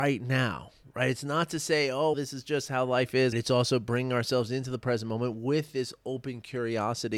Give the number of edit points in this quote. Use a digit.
2